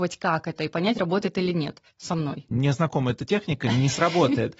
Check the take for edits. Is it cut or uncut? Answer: cut